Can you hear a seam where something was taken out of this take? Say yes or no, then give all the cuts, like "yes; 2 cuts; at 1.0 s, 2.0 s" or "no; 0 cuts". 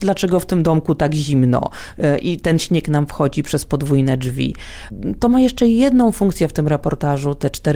no; 0 cuts